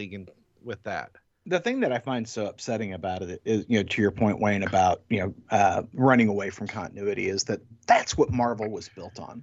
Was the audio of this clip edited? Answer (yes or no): no